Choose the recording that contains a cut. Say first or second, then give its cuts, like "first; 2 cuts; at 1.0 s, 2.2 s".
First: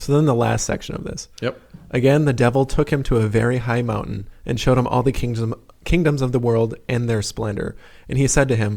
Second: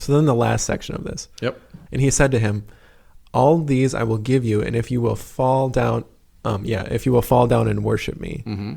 second; 1 cut; at 1.9 s